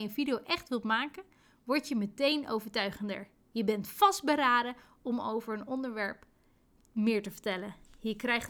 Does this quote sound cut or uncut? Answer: uncut